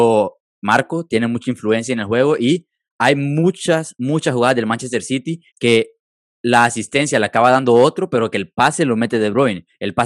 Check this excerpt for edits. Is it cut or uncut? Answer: cut